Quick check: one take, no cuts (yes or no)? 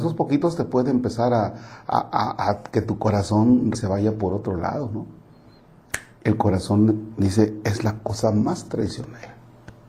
no